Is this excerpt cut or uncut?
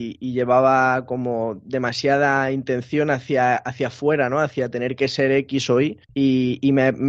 cut